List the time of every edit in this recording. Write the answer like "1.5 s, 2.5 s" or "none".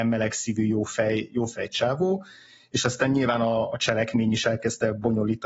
none